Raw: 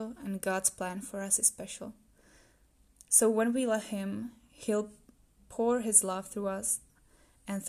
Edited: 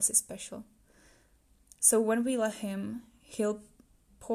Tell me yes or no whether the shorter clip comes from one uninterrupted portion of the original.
yes